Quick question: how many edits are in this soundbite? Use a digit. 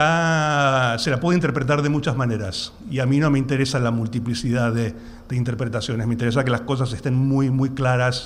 0